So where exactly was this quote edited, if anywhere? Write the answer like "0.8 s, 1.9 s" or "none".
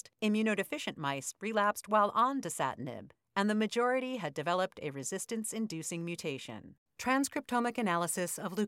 6.9 s